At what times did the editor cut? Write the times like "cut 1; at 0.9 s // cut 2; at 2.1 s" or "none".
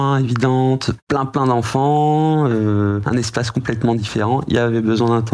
cut 1; at 1.0 s

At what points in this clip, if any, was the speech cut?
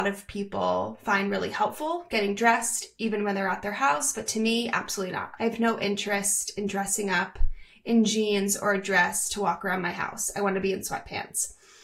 cut 1; at 5.4 s

